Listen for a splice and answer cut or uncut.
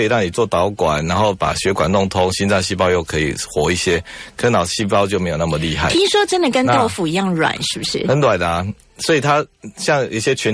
uncut